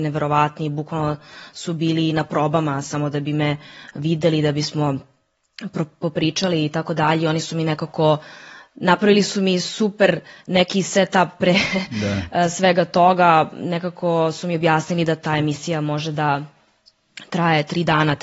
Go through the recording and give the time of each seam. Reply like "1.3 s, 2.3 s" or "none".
none